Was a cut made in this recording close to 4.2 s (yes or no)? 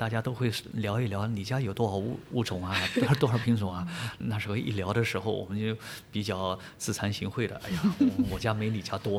yes